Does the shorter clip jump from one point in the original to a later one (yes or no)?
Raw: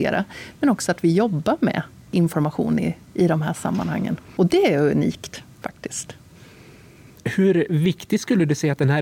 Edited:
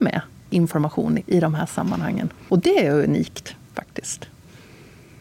yes